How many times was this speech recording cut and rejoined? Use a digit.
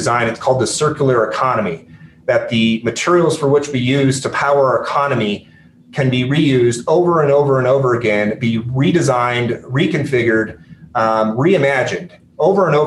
0